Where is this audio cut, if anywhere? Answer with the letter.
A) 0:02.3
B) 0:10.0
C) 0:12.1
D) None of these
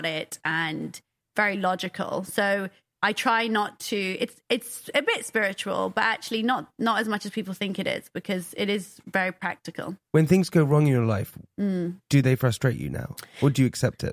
B